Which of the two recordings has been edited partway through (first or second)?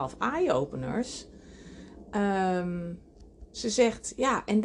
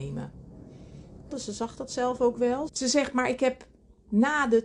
second